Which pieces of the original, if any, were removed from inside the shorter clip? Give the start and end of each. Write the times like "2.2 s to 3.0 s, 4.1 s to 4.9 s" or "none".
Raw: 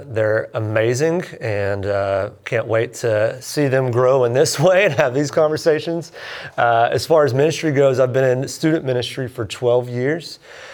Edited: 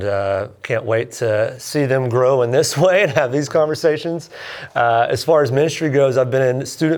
none